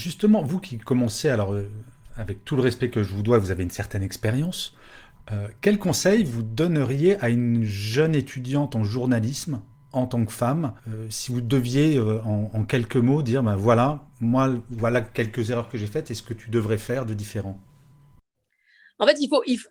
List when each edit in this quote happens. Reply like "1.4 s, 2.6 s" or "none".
10.8 s